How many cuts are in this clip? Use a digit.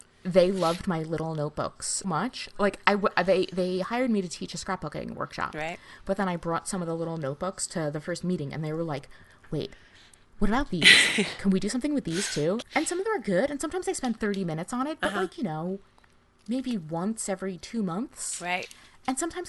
2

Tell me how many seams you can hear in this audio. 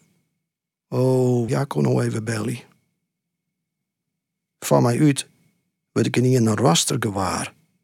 1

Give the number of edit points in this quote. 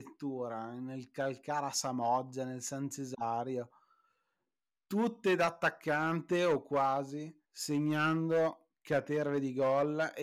1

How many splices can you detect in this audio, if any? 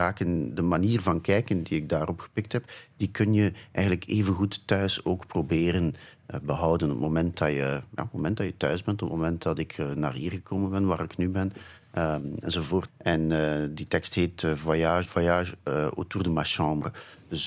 2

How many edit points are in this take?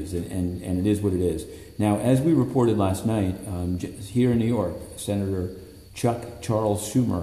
1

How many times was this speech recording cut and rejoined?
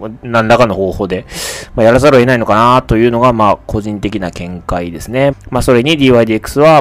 1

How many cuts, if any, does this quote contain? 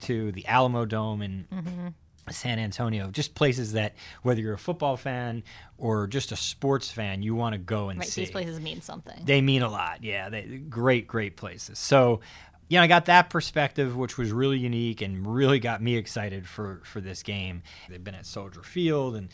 2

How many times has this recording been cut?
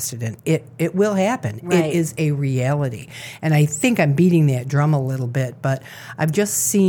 0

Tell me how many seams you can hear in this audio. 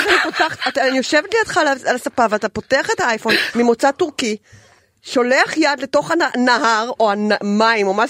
1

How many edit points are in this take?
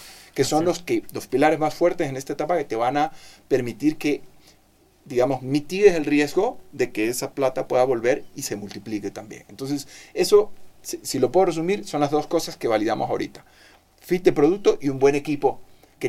0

